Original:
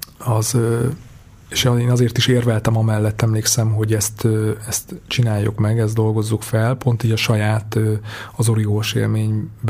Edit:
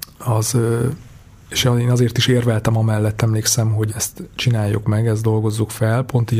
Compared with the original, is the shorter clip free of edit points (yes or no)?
no